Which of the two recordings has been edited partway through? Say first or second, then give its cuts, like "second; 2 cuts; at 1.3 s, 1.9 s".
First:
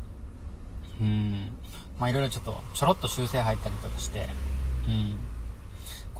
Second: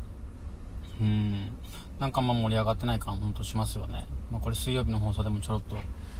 first; 1 cut; at 1.9 s